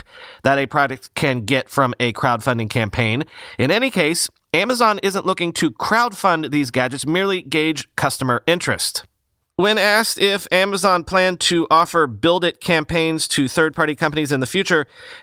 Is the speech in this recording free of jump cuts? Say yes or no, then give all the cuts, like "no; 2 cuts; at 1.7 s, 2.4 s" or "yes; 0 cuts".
no; 1 cut; at 3.6 s